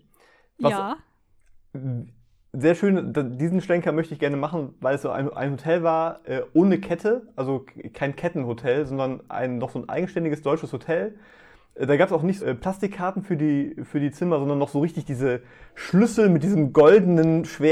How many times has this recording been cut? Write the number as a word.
one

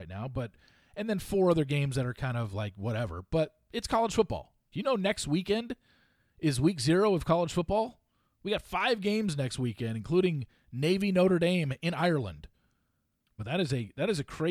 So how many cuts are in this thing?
two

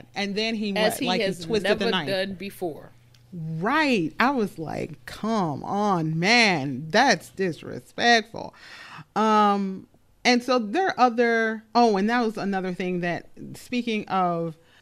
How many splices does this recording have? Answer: zero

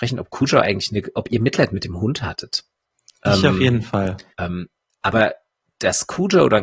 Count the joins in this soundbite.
one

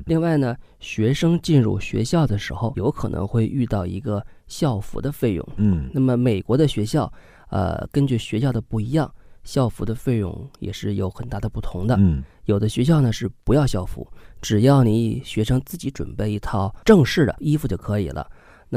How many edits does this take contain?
one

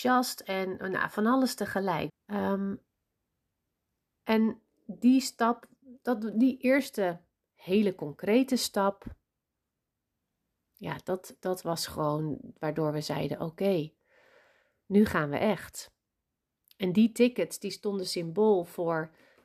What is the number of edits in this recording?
one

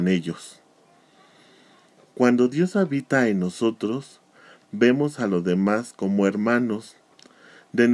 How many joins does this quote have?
zero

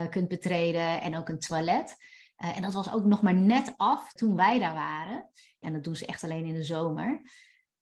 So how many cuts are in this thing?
two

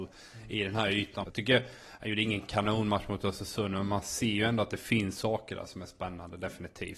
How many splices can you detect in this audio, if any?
one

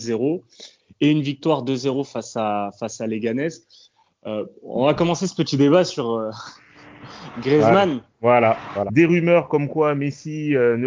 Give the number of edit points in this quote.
one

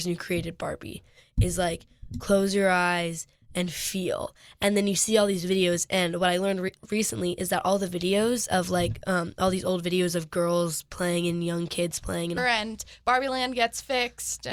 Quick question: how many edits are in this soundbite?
one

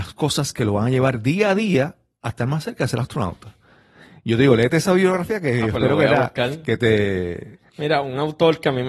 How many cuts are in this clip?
one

